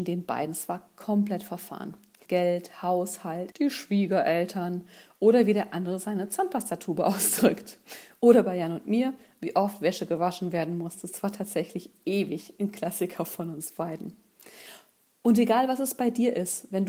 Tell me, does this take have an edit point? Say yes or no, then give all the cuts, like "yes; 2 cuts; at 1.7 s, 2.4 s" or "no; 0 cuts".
yes; 2 cuts; at 2.3 s, 3.5 s